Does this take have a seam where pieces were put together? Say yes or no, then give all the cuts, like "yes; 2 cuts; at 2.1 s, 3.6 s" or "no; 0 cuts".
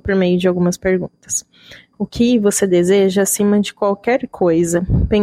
yes; 1 cut; at 1.9 s